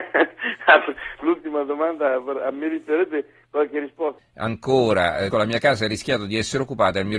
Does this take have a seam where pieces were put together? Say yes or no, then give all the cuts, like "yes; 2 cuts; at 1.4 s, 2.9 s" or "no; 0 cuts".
yes; 2 cuts; at 4.2 s, 5.3 s